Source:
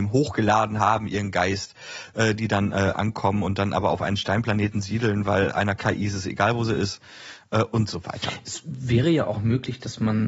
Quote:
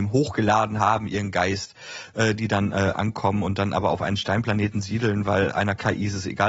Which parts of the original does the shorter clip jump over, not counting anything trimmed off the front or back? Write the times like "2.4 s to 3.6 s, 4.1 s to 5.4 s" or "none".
none